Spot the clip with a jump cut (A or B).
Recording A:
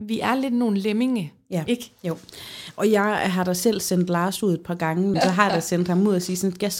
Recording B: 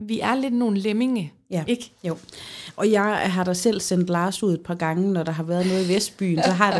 A